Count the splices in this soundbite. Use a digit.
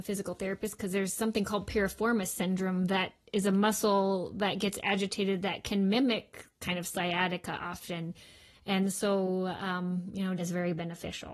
1